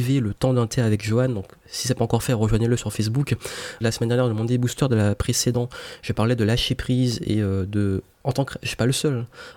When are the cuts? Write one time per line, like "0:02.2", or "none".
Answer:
0:03.8